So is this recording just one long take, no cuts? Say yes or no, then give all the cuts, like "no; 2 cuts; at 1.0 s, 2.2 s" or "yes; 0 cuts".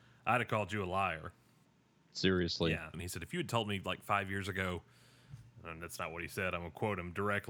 no; 1 cut; at 2.9 s